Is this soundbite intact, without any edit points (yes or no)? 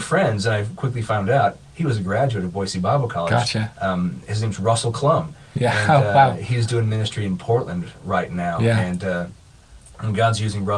yes